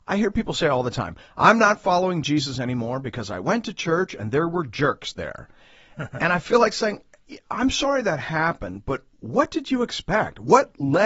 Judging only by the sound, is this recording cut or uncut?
uncut